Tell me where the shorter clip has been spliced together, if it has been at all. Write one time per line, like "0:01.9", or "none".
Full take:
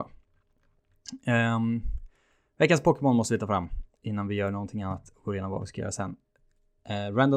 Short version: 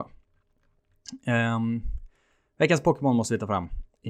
none